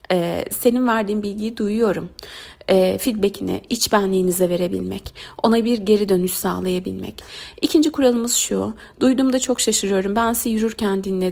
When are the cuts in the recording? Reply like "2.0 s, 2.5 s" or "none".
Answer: 3.7 s